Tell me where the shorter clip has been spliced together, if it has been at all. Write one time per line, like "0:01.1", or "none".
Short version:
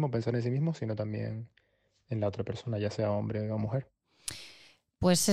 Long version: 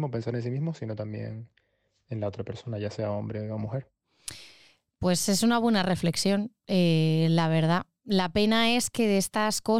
none